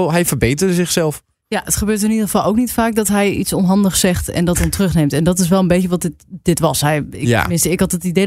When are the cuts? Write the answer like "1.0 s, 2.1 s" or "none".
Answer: none